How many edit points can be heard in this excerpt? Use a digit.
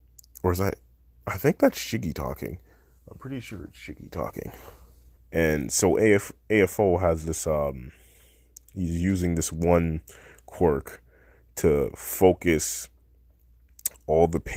1